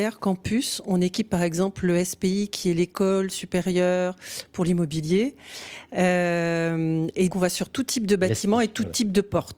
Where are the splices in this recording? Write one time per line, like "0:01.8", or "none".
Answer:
0:07.3